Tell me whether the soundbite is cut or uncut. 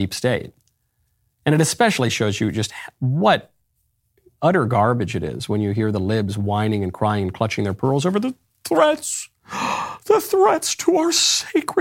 uncut